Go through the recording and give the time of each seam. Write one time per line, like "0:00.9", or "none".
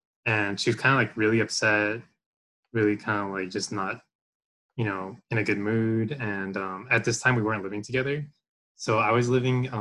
none